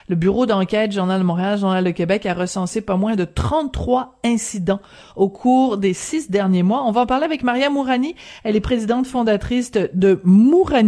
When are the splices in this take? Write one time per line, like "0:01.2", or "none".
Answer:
none